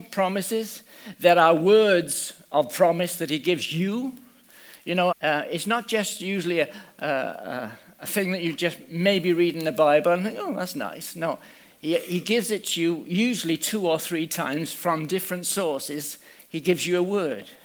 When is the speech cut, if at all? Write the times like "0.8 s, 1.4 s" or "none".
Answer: 5.1 s